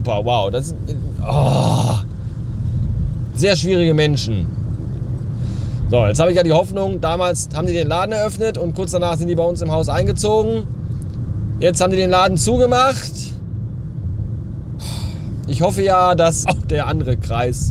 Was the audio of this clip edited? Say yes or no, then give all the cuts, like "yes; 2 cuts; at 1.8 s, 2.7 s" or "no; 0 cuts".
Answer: yes; 1 cut; at 16.4 s